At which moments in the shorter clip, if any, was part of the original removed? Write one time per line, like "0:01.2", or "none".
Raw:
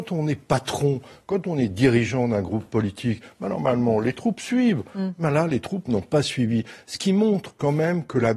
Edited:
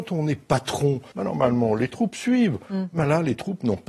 0:01.1